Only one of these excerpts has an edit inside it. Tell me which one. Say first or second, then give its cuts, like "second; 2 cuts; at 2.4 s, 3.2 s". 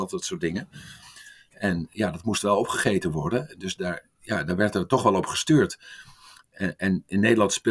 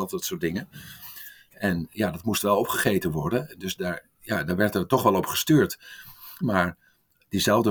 second; 1 cut; at 6.4 s